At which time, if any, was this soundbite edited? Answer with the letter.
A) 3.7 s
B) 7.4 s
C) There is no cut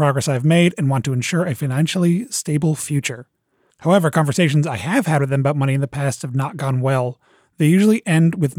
A